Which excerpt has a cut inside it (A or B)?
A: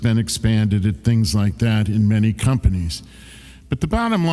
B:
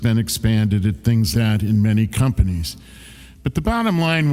B